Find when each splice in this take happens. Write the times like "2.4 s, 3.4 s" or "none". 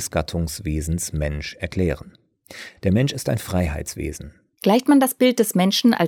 2.8 s, 4.5 s